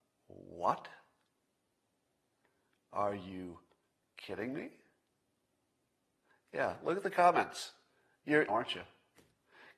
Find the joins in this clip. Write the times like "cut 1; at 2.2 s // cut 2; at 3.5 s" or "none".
cut 1; at 8.5 s